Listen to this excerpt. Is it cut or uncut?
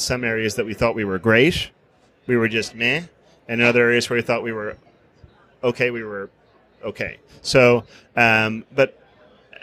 uncut